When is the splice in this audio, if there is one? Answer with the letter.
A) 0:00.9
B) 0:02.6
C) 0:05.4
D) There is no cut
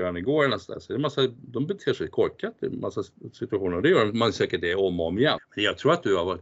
C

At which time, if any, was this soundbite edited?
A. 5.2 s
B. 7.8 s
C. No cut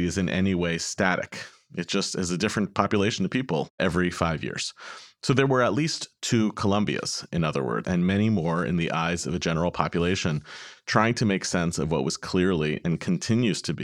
B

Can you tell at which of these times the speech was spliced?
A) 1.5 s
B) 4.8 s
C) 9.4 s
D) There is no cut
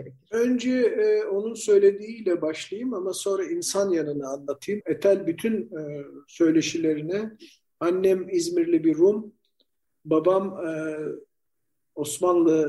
B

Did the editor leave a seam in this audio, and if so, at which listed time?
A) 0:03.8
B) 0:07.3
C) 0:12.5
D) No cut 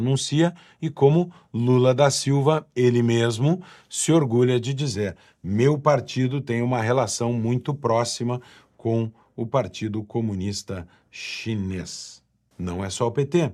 C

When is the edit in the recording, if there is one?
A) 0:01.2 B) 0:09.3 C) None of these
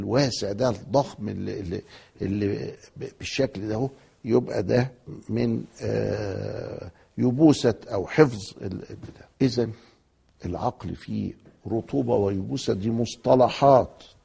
B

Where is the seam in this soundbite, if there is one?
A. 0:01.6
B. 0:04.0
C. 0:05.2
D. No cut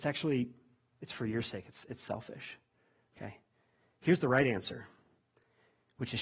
D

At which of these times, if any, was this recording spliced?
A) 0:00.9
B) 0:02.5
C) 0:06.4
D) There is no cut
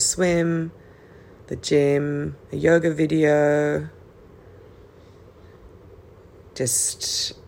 B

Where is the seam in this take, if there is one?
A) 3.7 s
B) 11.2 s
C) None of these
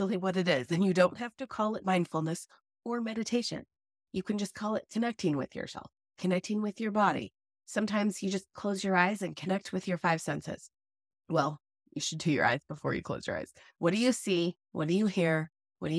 C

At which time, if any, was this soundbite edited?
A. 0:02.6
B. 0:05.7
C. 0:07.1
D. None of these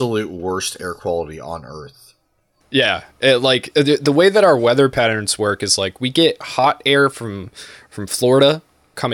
A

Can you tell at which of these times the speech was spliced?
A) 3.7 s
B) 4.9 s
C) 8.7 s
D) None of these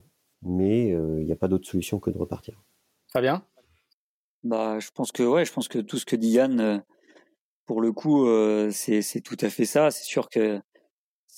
C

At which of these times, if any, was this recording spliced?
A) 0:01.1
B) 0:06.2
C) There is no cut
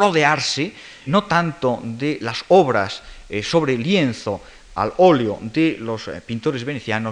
A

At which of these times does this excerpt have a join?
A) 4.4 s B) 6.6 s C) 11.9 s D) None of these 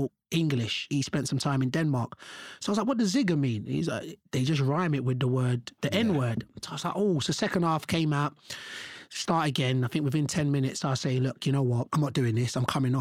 D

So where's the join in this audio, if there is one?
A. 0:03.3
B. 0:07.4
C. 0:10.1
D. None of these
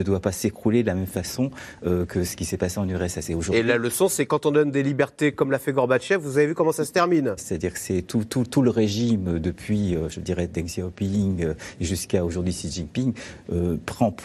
B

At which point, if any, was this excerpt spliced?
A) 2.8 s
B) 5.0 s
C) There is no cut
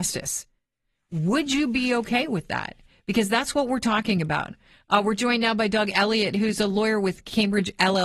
C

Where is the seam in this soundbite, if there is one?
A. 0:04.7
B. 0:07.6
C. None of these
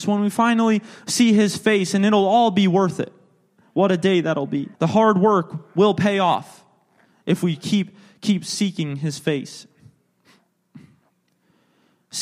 A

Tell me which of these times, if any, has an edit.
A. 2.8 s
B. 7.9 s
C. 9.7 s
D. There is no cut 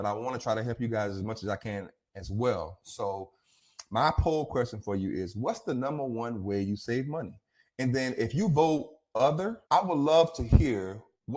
C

